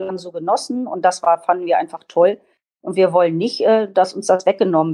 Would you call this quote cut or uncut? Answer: uncut